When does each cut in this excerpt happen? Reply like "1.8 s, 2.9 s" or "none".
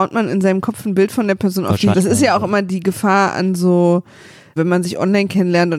1.9 s, 4.6 s